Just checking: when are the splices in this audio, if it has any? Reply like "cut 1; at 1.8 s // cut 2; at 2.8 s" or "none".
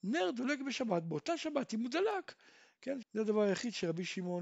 cut 1; at 3.0 s